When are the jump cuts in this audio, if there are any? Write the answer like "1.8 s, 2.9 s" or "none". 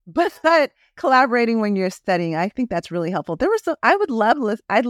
none

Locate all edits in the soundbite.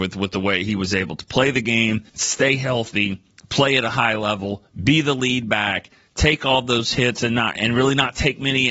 2.1 s, 7.6 s

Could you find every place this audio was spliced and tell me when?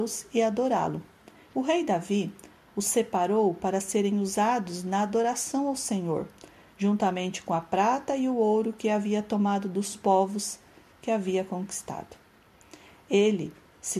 1.5 s

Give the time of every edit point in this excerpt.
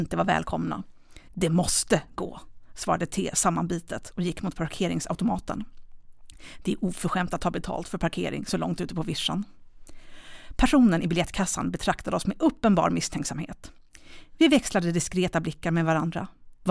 1.3 s

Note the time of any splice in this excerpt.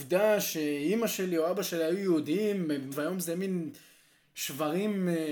2.9 s

